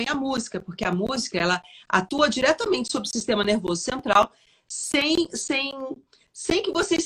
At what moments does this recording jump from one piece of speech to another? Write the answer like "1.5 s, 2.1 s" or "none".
none

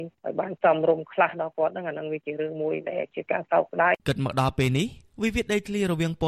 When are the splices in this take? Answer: 4.0 s

